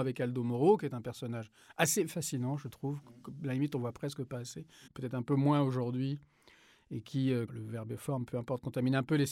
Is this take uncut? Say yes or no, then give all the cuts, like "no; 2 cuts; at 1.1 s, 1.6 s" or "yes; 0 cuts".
no; 2 cuts; at 4.9 s, 7.5 s